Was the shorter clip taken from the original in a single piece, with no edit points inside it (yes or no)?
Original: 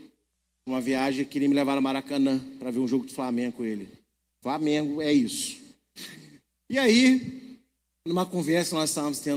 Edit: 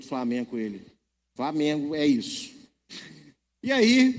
yes